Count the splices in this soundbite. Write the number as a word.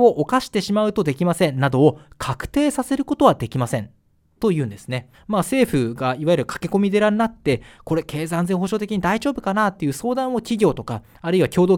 one